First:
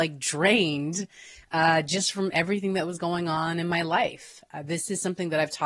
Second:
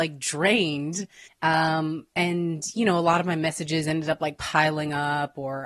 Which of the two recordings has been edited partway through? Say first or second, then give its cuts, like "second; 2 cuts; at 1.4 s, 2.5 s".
second; 1 cut; at 1.3 s